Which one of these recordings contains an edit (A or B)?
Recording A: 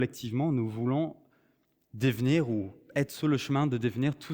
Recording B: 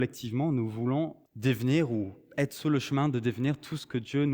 B